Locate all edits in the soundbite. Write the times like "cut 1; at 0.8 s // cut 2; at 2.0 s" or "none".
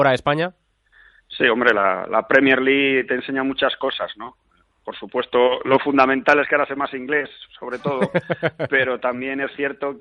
none